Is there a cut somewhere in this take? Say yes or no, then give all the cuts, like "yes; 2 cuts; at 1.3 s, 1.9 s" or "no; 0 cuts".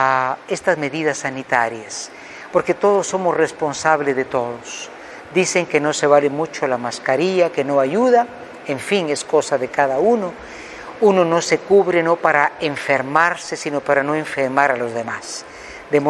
no; 0 cuts